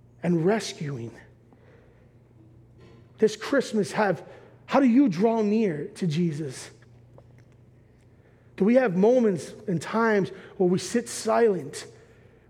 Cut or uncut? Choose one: uncut